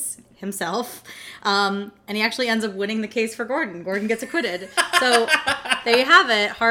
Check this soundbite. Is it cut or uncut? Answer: uncut